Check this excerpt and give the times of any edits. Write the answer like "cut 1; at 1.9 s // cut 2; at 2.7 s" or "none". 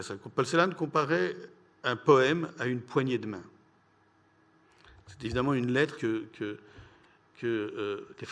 cut 1; at 6.0 s

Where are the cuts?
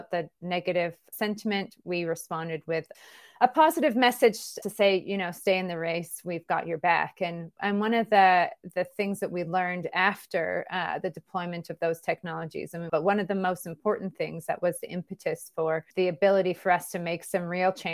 cut 1; at 12.9 s // cut 2; at 15.9 s

